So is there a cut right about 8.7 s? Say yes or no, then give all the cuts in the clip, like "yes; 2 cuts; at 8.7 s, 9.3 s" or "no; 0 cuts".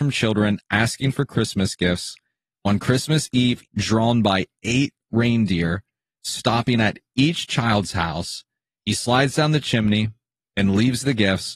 no; 1 cut; at 3.6 s